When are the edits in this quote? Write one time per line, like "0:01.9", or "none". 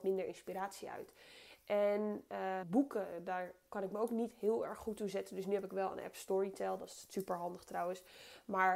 0:02.6